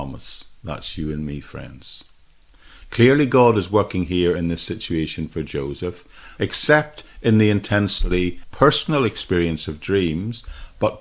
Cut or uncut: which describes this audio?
cut